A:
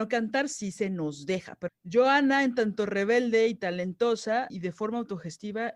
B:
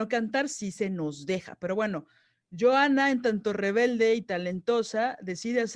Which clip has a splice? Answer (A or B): A